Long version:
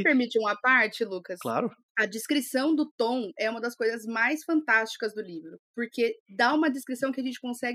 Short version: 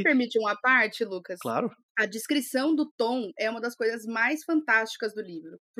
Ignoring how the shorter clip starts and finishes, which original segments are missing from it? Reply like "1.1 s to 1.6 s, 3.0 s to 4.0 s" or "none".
none